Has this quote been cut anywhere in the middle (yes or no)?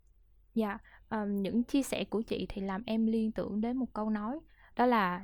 no